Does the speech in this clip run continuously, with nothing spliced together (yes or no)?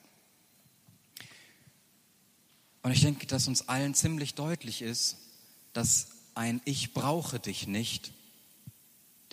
yes